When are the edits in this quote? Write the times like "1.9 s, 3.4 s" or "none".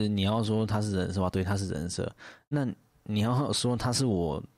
none

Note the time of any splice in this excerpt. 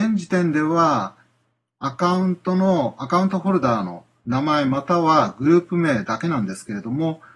none

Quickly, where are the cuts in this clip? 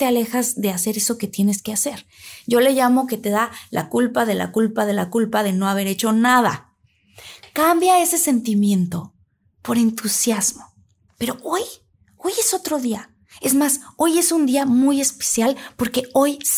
11.1 s

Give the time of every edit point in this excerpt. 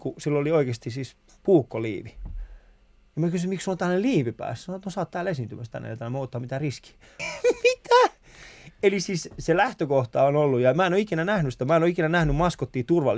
7.2 s

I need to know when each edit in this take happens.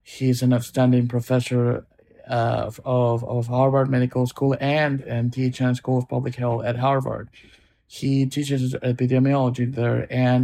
none

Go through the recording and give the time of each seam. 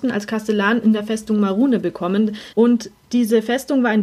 2.5 s

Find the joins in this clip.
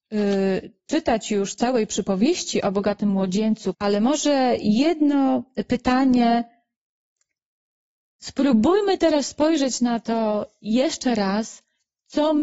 3.7 s

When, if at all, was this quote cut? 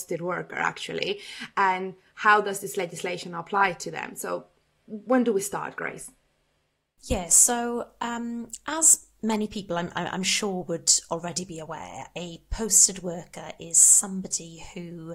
none

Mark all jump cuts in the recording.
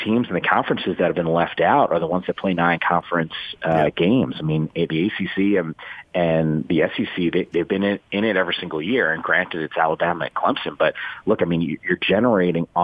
none

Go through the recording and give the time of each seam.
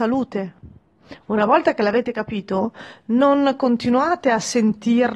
1.2 s

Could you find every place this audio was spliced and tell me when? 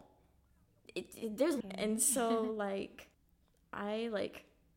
1.6 s, 3.1 s

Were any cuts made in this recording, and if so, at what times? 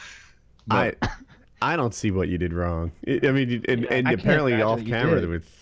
none

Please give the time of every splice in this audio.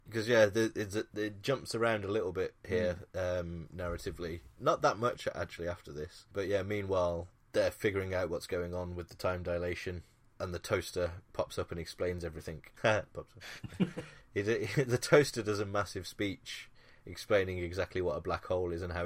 12.8 s

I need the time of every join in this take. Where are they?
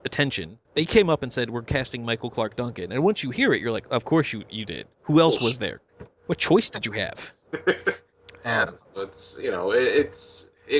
none

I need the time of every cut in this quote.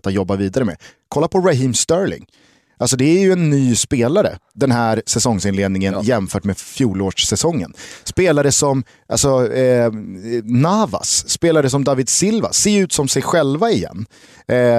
none

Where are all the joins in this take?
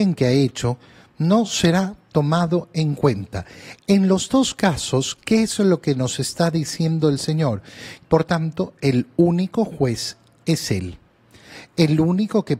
8.0 s

